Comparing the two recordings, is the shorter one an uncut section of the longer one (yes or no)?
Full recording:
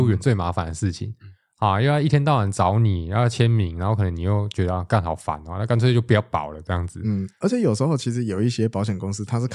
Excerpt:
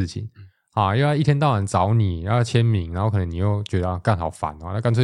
yes